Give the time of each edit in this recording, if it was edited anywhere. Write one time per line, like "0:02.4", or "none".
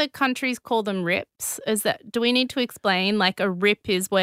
none